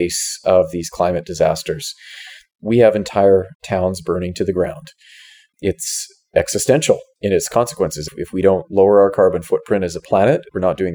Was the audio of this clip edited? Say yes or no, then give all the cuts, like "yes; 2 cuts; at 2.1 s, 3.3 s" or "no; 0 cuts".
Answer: yes; 2 cuts; at 3.5 s, 5.5 s